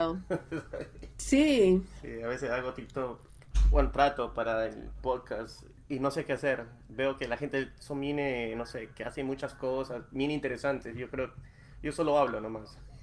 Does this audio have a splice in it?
no; 0 cuts

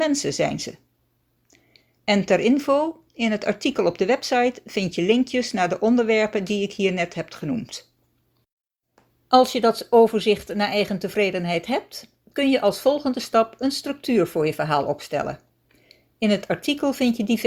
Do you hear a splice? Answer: no; 0 cuts

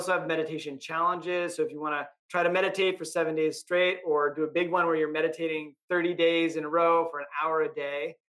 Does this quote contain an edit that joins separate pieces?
no; 0 cuts

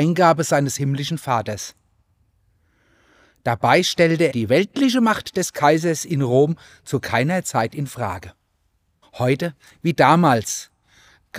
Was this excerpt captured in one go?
no; 2 cuts; at 4.3 s, 9.0 s

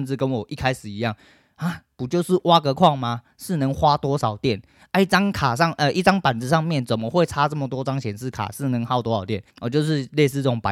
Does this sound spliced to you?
yes; 1 cut; at 9.5 s

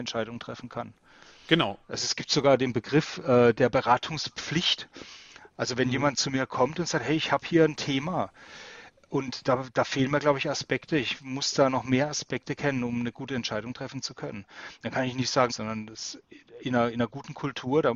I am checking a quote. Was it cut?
yes; 2 cuts; at 1.8 s, 15.5 s

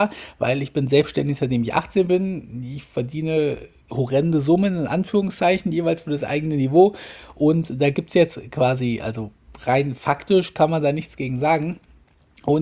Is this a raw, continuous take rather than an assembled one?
no; 1 cut; at 3.8 s

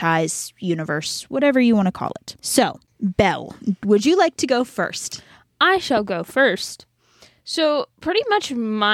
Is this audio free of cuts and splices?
no; 1 cut; at 2.4 s

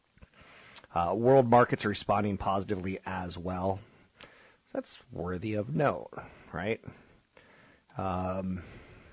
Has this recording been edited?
no; 0 cuts

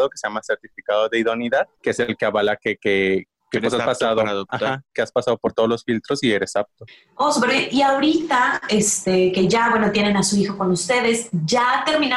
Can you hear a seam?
yes; 1 cut; at 1.7 s

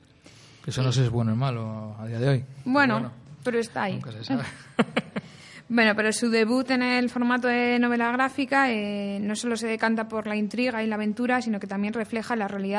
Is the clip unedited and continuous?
yes; 0 cuts

